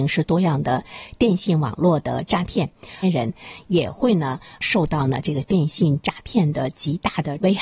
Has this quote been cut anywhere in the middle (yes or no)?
yes